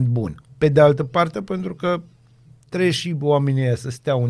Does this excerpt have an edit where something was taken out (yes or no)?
yes